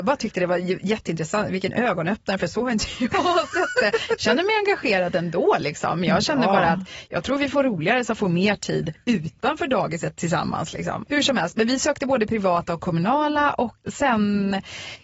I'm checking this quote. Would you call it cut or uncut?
cut